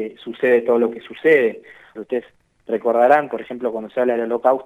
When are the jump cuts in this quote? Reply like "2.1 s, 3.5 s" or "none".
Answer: 2.0 s